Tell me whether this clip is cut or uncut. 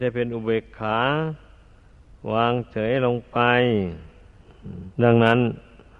cut